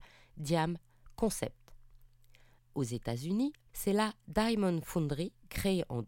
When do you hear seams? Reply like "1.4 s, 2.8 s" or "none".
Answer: 3.7 s